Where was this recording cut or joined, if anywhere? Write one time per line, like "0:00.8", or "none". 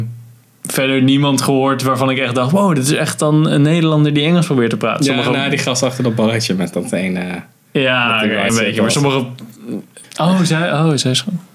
0:08.5
0:10.0